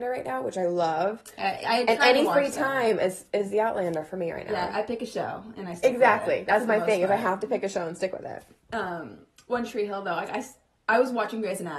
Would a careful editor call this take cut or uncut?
uncut